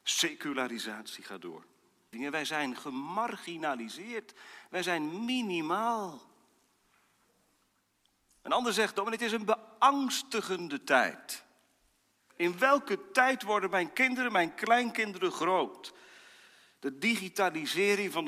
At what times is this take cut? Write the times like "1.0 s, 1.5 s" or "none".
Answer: 2.1 s